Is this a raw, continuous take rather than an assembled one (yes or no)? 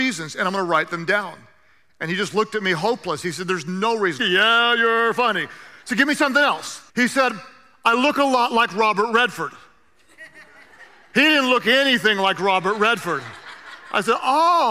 no